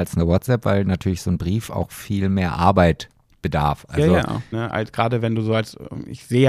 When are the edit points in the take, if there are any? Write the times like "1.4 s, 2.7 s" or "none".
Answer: 4.5 s